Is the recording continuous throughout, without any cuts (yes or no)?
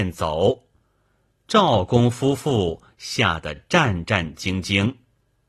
yes